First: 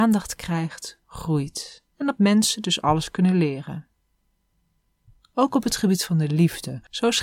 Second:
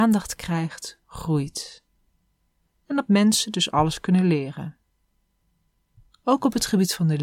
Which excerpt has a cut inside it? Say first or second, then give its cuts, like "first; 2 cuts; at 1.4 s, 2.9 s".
first; 1 cut; at 1.9 s